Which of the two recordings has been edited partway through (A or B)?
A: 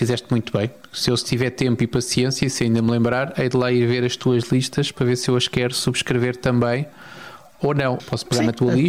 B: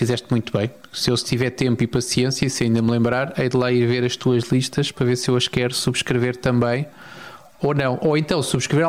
A